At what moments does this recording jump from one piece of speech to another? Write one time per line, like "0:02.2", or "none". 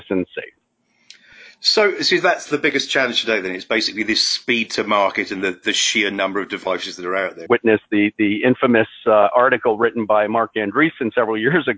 0:07.5